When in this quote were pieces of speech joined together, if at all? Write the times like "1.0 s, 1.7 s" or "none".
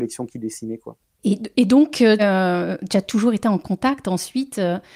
2.2 s